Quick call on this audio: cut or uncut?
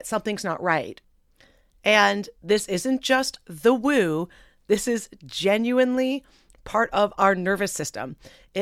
uncut